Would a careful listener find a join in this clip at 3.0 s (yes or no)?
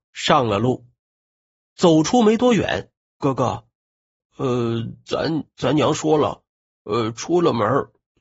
yes